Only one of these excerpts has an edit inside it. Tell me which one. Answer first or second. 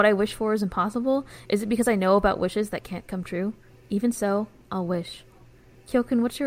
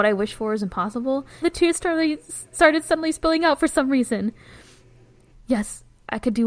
second